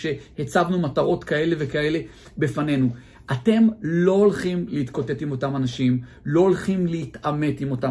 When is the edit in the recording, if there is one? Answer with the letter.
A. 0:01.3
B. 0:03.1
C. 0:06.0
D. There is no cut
D